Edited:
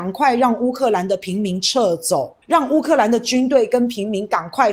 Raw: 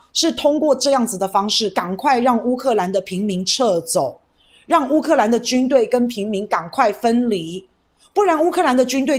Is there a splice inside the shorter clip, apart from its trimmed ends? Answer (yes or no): yes